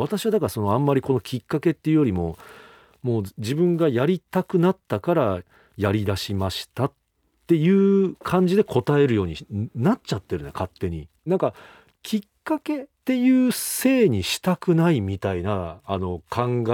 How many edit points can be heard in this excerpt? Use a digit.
2